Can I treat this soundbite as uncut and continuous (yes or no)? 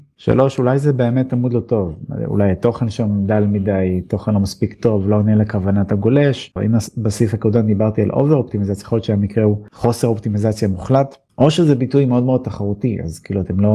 no